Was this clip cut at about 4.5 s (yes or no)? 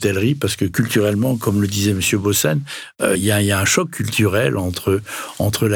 no